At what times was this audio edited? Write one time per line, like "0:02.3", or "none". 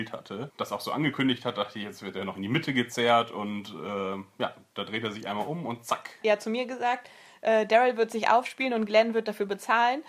0:06.2